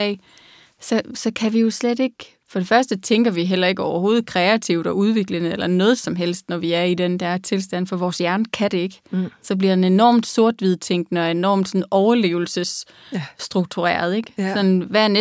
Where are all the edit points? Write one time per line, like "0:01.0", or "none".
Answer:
none